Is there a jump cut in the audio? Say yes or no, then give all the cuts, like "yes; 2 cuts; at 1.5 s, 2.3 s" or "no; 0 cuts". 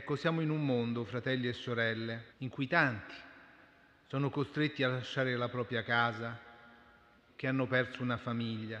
yes; 2 cuts; at 2.3 s, 7.3 s